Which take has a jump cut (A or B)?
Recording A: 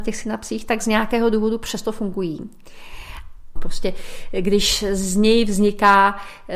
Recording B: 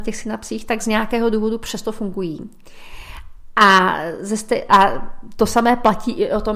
A